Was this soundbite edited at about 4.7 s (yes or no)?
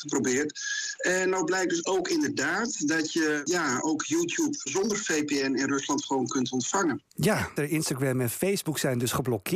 yes